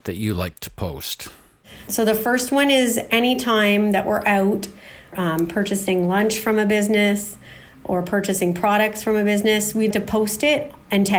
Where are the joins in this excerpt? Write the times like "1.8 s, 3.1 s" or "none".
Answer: 1.9 s, 9.9 s